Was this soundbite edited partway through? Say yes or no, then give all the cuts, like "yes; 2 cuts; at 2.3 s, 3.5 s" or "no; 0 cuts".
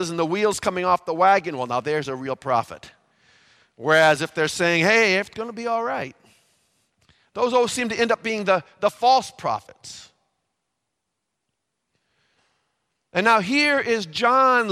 no; 0 cuts